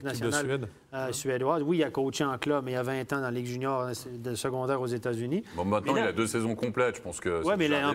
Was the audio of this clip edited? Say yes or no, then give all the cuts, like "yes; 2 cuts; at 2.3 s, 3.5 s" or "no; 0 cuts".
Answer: no; 0 cuts